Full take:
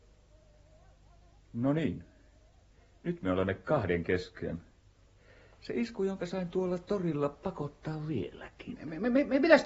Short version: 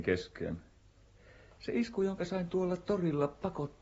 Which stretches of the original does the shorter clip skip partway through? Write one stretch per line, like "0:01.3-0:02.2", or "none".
none